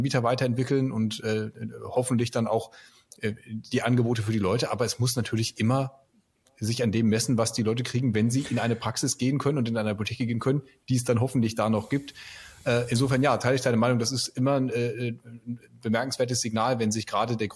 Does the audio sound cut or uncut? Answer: uncut